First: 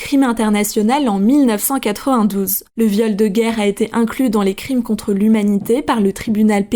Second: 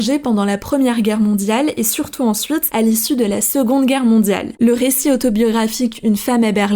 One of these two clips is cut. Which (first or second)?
second